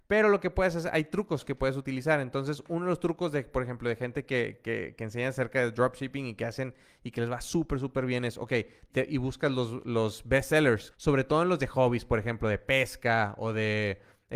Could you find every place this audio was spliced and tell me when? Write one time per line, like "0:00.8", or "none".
0:08.9
0:10.9